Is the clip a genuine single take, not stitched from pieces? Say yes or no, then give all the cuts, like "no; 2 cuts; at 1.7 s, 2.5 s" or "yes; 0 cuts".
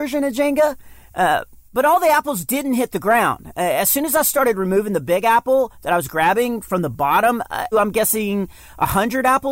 no; 1 cut; at 7.7 s